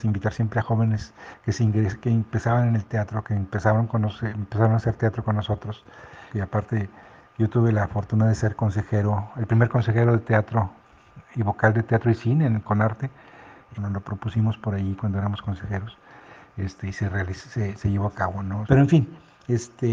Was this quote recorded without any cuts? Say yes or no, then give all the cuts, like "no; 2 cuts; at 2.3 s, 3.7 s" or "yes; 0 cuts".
no; 3 cuts; at 6.3 s, 13.7 s, 18.6 s